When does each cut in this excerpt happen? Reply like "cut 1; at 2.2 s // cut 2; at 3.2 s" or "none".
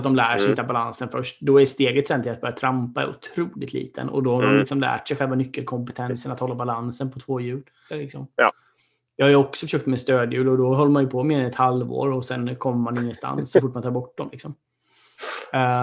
cut 1; at 7.9 s